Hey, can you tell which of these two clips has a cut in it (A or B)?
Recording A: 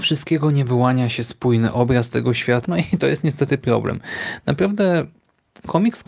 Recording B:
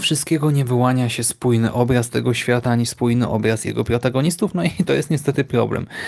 A